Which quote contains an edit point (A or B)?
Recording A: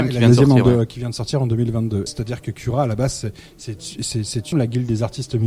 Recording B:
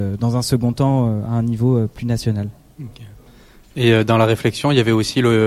A